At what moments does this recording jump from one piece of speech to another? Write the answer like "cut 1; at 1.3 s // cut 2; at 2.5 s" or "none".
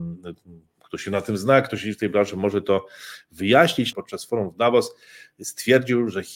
cut 1; at 3.9 s